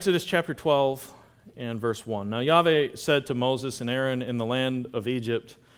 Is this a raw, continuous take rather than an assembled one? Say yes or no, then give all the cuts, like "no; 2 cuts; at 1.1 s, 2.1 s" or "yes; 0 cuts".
yes; 0 cuts